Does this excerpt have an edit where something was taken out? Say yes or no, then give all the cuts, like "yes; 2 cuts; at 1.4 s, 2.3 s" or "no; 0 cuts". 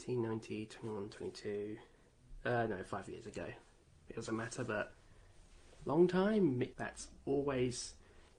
yes; 1 cut; at 6.7 s